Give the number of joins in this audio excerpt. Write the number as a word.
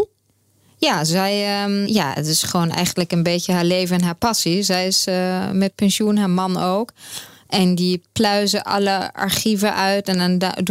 one